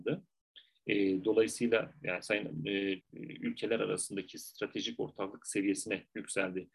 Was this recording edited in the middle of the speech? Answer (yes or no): yes